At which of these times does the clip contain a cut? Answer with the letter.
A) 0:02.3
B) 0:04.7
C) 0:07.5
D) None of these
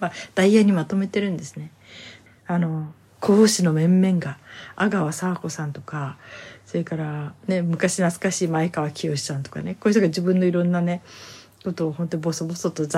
A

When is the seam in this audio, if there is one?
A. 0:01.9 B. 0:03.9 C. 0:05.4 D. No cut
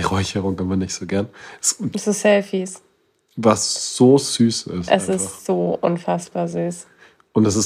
A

